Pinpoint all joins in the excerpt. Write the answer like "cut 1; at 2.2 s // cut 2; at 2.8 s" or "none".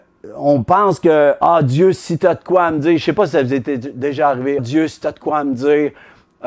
cut 1; at 4.6 s